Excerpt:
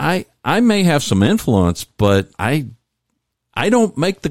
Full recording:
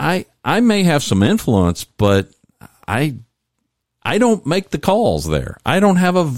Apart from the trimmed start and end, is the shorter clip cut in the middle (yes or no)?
yes